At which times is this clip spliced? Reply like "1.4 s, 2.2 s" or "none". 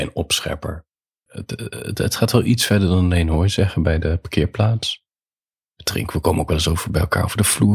1.3 s